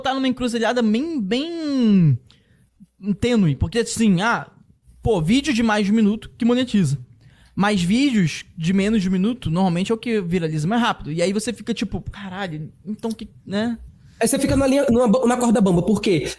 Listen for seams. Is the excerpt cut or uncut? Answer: uncut